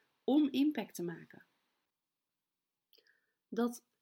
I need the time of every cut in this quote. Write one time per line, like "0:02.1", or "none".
none